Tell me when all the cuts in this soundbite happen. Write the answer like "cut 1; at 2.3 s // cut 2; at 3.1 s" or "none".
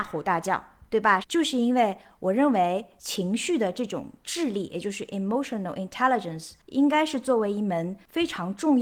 cut 1; at 1.2 s